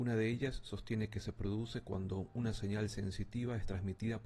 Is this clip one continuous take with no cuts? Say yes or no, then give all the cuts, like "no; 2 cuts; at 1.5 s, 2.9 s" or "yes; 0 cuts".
yes; 0 cuts